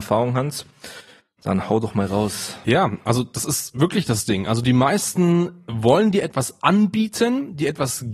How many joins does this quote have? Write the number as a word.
zero